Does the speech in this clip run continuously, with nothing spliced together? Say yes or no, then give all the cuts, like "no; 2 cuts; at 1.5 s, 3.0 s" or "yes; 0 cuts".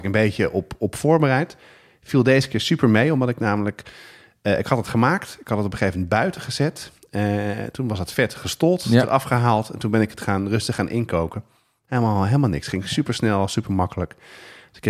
yes; 0 cuts